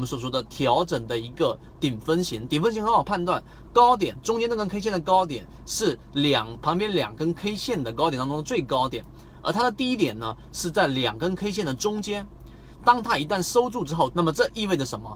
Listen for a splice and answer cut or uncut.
cut